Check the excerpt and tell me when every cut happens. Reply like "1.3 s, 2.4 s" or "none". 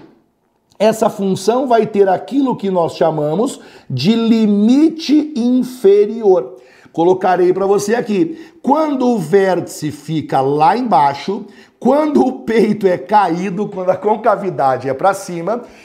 none